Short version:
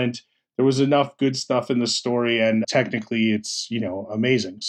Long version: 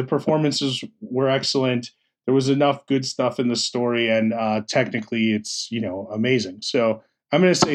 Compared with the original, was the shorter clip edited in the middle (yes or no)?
yes